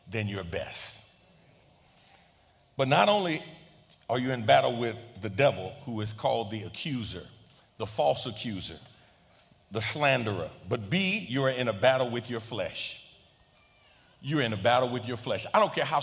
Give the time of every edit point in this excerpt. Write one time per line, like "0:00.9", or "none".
none